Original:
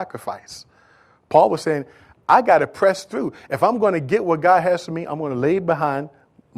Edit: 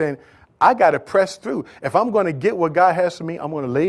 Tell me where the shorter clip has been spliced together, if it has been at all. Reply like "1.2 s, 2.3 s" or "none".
none